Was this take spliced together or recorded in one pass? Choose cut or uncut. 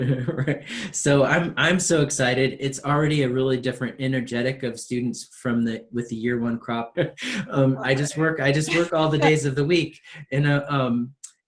cut